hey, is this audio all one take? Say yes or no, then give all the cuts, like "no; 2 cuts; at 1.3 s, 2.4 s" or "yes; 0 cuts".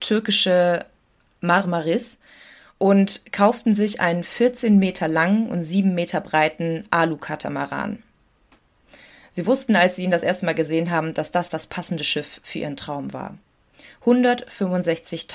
yes; 0 cuts